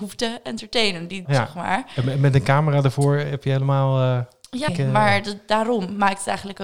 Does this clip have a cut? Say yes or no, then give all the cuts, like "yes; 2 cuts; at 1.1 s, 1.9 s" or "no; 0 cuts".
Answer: yes; 2 cuts; at 1.2 s, 4.7 s